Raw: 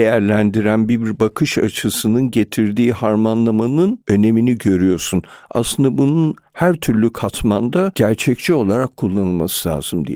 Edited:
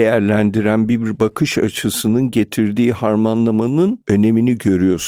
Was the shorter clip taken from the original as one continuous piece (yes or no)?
yes